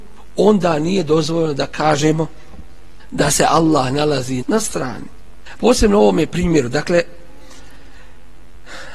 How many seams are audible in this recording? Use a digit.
2